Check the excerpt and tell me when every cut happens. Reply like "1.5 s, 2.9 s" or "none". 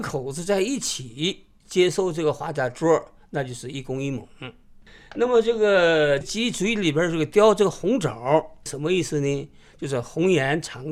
none